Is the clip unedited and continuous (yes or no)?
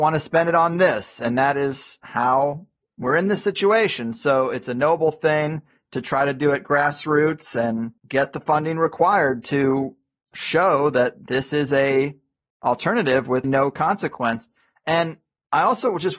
no